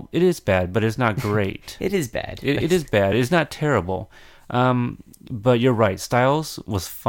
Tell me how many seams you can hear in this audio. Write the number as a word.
zero